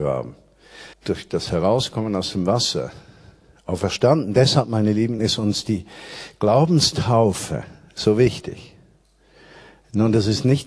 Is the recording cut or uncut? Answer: cut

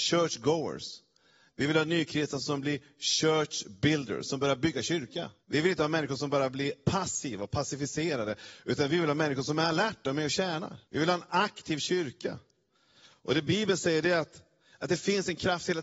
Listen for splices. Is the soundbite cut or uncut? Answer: cut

